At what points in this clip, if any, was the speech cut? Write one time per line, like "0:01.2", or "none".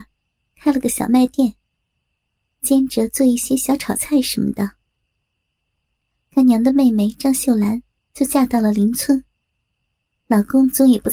none